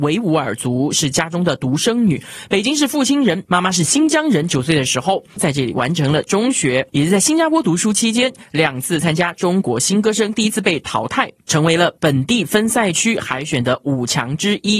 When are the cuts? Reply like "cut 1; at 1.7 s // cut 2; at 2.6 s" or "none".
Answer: cut 1; at 5.4 s